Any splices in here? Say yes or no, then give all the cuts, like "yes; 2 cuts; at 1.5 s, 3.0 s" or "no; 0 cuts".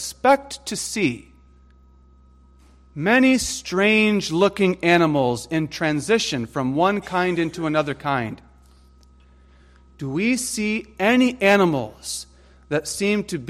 no; 0 cuts